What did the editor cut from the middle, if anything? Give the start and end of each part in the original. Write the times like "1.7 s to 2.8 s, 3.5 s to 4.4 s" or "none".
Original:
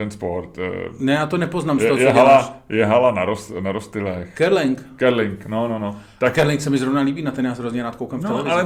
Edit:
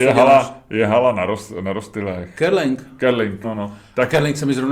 5.4 s to 5.7 s